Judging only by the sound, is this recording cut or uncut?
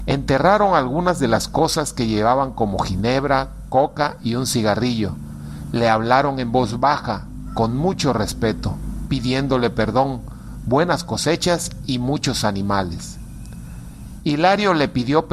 uncut